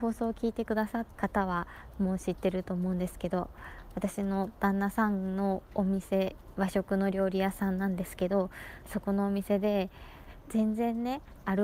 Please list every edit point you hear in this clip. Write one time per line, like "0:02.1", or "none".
0:01.1